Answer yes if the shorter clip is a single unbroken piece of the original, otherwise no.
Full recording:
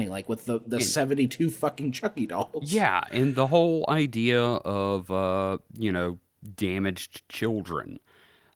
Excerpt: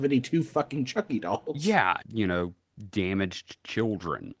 no